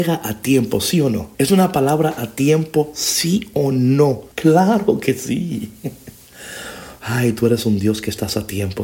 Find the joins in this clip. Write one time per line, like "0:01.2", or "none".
0:01.3
0:04.3